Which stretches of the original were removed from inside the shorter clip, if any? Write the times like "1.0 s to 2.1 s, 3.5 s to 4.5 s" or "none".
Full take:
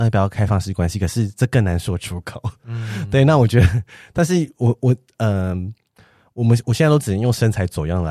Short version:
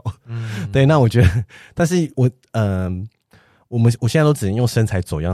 4.5 s to 4.8 s